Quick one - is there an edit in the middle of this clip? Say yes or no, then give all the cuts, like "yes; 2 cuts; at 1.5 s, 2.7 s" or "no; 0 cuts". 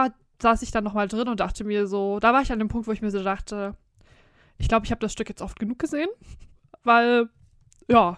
no; 0 cuts